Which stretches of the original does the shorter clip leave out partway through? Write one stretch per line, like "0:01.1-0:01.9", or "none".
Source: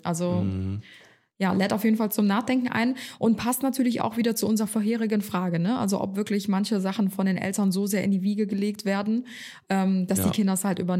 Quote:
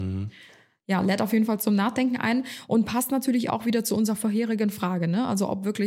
none